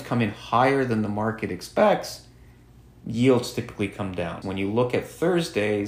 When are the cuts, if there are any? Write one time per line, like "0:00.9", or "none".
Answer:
0:04.4